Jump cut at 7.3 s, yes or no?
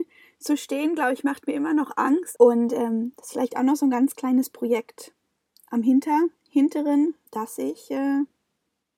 yes